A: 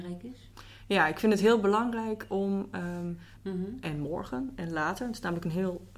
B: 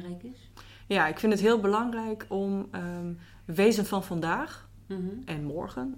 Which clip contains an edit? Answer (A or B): A